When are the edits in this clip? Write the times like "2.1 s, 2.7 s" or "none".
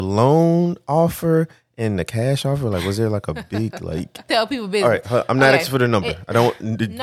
4.3 s

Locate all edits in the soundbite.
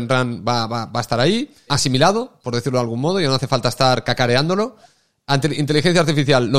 1.7 s

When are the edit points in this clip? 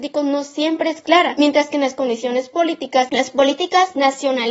3.1 s

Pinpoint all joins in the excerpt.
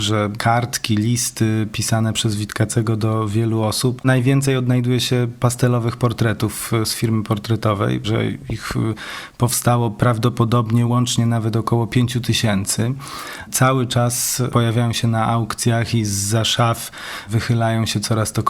4.0 s, 8.0 s

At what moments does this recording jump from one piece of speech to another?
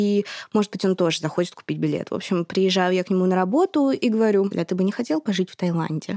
4.5 s

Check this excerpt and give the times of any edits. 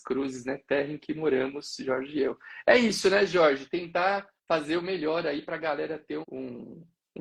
4.4 s, 6.2 s

